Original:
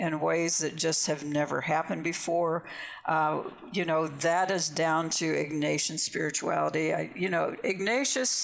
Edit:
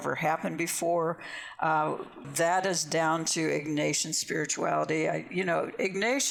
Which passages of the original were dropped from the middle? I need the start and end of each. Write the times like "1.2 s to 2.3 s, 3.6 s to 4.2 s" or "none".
3.7 s to 4.1 s

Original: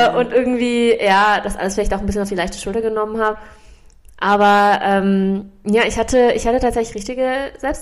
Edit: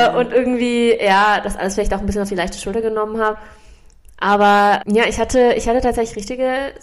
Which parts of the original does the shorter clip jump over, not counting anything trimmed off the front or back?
4.8 s to 5.6 s

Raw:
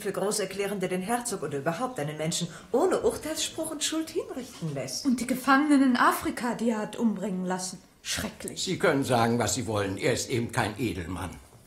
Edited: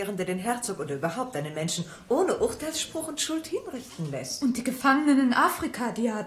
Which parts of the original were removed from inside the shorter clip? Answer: none

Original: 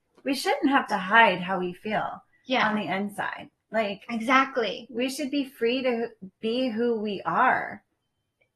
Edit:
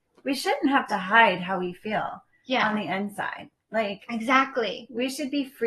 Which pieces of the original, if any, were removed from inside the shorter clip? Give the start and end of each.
none

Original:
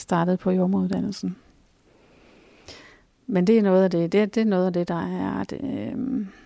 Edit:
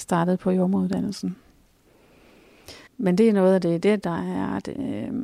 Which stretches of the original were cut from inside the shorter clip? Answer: 2.9 s to 3.2 s, 4.3 s to 4.9 s

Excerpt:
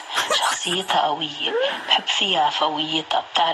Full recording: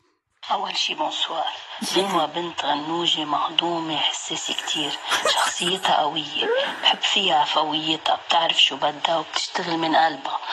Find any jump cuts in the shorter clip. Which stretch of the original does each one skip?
none

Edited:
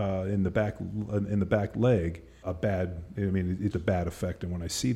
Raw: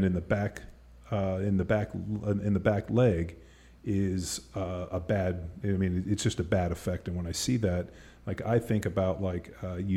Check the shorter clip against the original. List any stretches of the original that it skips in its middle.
3.6 s to 4.9 s, 6.2 s to 6.4 s

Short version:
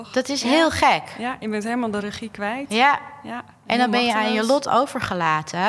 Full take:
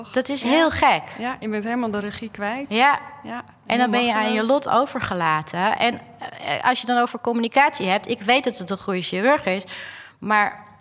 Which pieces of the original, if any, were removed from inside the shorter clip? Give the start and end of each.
none

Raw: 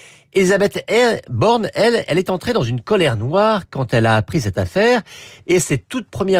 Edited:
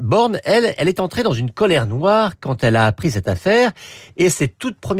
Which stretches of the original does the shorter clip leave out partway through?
none

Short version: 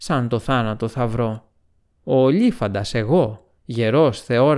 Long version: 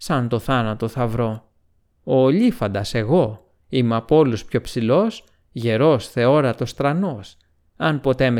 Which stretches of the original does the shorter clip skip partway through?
3.6 s to 5.4 s

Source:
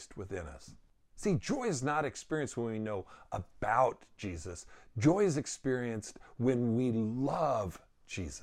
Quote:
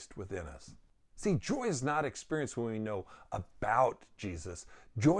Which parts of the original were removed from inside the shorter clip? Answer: none

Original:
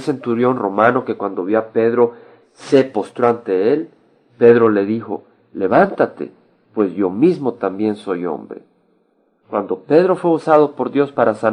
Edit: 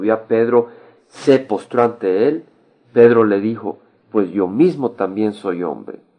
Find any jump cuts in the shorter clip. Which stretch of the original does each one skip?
5.4 s to 6.6 s

